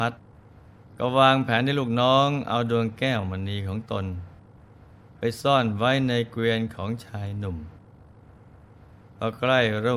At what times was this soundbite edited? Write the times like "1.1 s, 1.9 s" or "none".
none